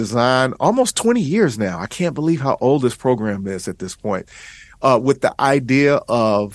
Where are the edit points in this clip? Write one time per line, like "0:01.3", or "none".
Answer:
none

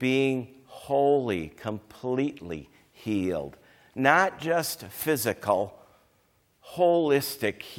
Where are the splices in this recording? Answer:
0:06.6

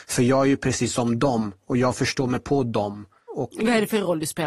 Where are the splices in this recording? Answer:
0:03.3

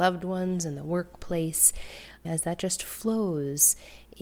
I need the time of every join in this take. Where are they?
0:02.2

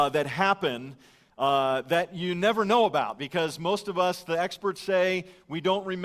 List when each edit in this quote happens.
none

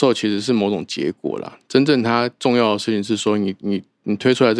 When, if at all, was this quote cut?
none

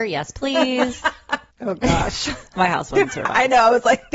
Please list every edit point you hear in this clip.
0:01.5

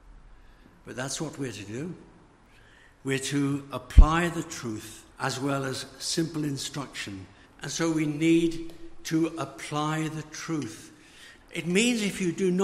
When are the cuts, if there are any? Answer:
0:05.1
0:07.5
0:11.4

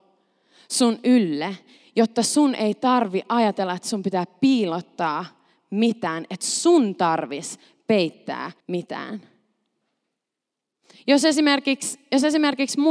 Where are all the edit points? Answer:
0:08.6

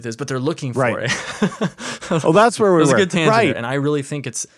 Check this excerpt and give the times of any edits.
0:01.0
0:03.5

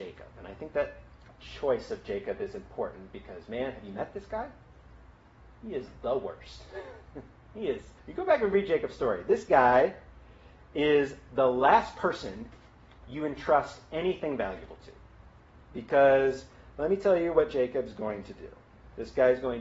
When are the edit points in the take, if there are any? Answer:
0:08.0

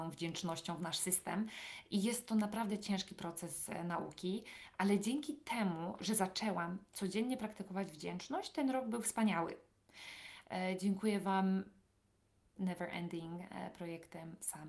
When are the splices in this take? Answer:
0:10.4
0:12.6

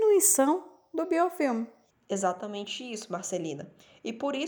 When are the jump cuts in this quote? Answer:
0:01.9

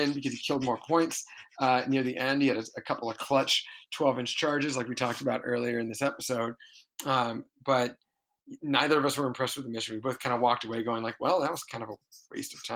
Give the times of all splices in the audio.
none

